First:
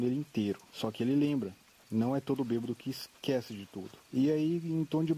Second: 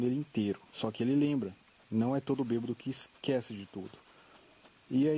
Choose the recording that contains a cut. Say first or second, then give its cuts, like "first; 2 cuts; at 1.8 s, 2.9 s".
first; 1 cut; at 4.0 s